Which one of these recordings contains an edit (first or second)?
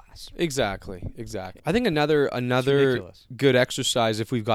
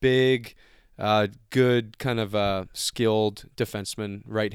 first